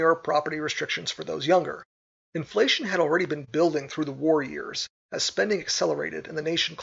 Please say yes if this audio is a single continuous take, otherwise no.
no